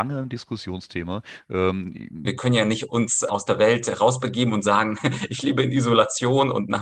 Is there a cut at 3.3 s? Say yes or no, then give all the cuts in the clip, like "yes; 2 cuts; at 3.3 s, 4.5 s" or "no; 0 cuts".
yes; 2 cuts; at 2.2 s, 3.3 s